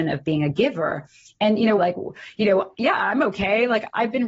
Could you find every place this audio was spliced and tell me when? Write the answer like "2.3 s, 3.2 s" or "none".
1.8 s